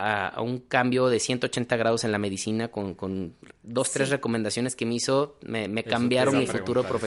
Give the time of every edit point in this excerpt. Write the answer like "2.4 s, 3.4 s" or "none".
none